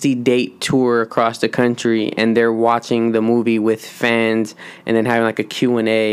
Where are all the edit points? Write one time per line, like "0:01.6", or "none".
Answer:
none